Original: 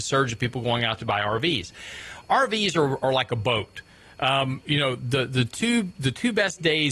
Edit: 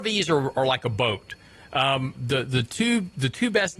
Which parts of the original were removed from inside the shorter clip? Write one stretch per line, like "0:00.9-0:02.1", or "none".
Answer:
0:04.6-0:05.0

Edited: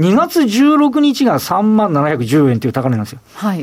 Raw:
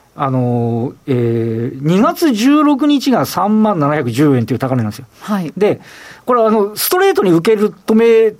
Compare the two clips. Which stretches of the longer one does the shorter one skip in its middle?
none

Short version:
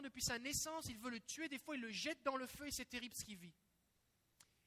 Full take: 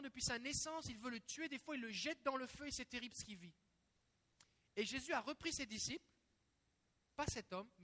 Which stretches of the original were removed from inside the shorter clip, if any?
none

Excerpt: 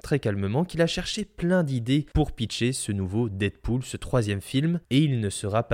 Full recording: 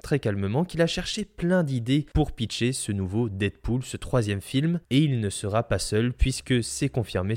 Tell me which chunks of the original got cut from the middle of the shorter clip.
none

